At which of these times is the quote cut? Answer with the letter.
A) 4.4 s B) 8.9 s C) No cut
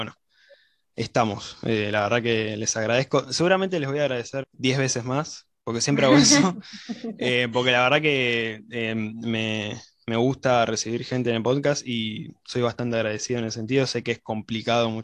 A